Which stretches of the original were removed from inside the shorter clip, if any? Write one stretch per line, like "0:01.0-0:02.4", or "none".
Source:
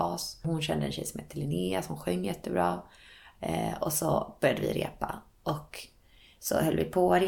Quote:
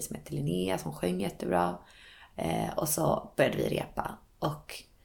none